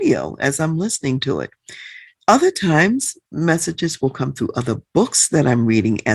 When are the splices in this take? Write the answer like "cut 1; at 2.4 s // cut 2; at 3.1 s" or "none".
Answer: none